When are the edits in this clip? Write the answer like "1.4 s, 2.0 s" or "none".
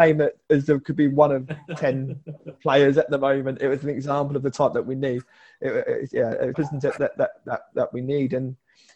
6.5 s